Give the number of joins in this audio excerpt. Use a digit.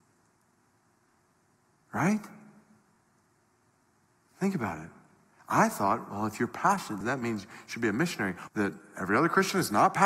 2